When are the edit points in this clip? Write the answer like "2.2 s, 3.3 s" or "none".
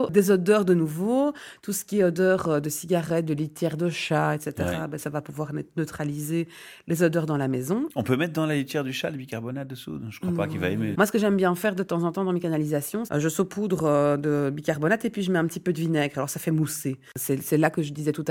10.9 s, 13.1 s

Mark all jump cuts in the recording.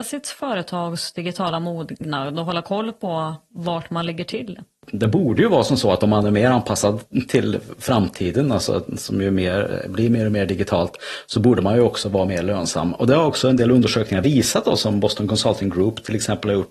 none

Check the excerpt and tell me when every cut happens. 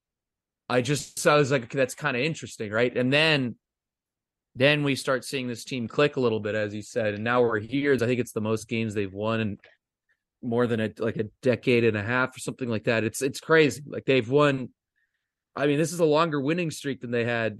8.0 s

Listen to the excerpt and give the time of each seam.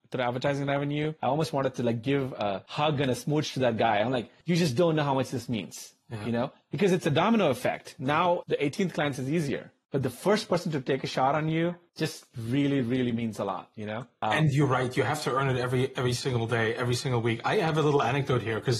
8.4 s

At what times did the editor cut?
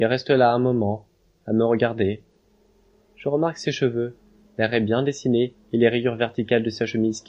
4.5 s

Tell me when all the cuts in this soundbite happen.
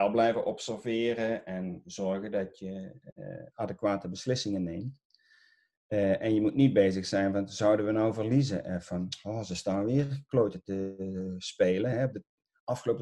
none

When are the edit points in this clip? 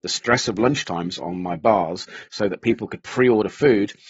none

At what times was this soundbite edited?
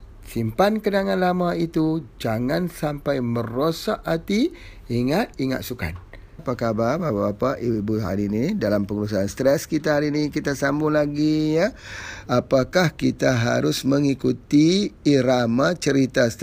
5.3 s, 6.4 s, 12.3 s

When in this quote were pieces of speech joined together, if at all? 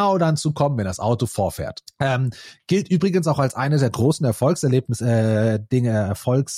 1.9 s

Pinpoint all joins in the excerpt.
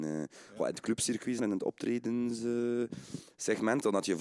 1.4 s

